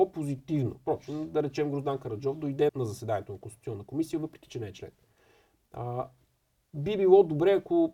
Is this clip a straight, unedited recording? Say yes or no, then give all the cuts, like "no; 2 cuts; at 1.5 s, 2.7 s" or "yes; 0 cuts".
no; 1 cut; at 2.7 s